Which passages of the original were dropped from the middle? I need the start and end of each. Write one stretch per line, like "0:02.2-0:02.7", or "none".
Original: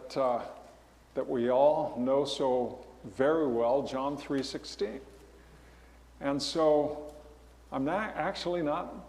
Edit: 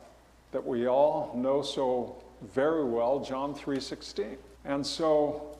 0:05.2-0:06.1